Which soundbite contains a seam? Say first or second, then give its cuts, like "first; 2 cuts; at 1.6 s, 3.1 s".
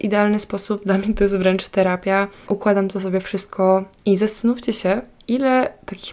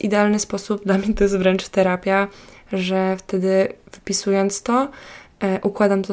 first; 2 cuts; at 2.5 s, 4.0 s